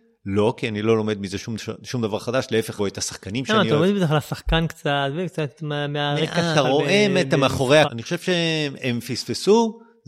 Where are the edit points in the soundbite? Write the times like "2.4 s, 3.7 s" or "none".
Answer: 2.8 s, 6.5 s, 7.8 s